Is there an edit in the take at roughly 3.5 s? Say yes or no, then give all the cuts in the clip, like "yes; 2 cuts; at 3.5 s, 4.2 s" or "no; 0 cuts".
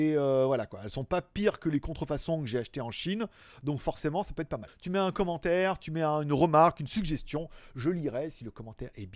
no; 1 cut; at 4.7 s